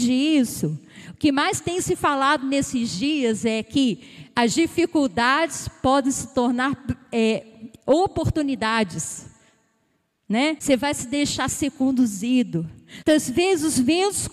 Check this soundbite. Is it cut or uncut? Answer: cut